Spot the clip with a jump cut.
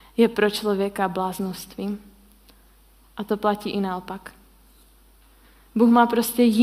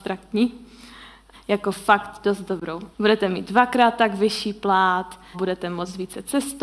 second; 3 cuts; at 1.3 s, 2.9 s, 5.3 s

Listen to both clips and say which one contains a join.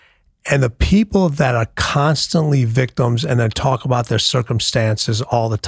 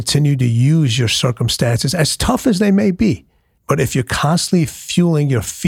second; 1 cut; at 3.6 s

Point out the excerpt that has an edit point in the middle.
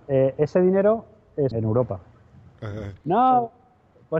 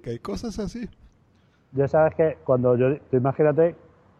first; 2 cuts; at 1.5 s, 3.0 s

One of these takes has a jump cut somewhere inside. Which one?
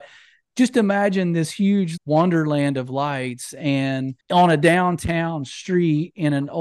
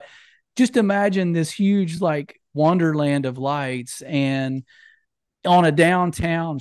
first; 2 cuts; at 2.0 s, 4.2 s

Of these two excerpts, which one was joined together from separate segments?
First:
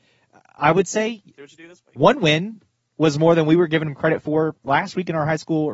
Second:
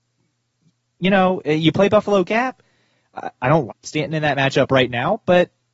second; 1 cut; at 3.7 s

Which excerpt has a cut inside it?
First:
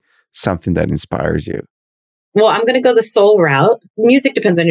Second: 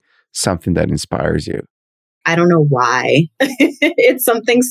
second; 1 cut; at 2.2 s

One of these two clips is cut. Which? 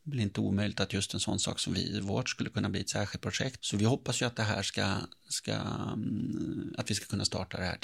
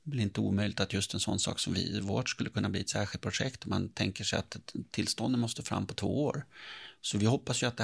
first; 1 cut; at 3.6 s

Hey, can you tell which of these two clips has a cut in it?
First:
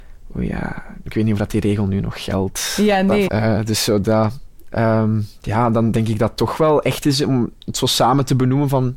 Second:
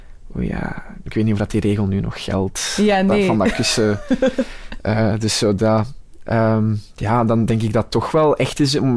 first; 1 cut; at 3.3 s

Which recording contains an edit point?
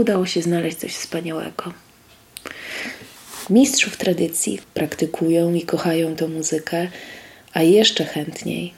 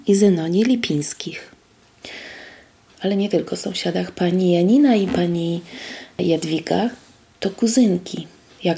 first; 1 cut; at 4.6 s

